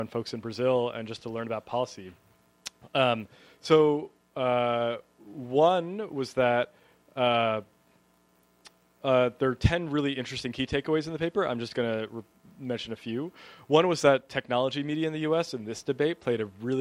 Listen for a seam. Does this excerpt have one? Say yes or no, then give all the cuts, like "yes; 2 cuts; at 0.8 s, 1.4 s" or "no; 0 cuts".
no; 0 cuts